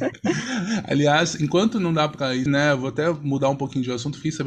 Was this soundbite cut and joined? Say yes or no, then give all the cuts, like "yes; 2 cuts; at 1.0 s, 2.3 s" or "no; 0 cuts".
yes; 1 cut; at 2.5 s